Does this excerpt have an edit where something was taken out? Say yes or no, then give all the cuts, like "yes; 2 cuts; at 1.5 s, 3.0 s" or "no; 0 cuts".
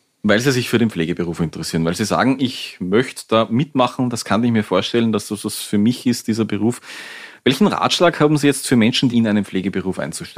yes; 1 cut; at 9.1 s